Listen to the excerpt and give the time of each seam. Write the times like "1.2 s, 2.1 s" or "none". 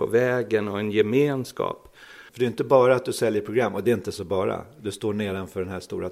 2.3 s